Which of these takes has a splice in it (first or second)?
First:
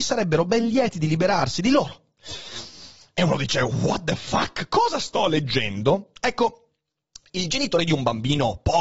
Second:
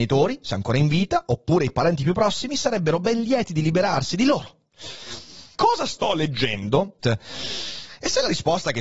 second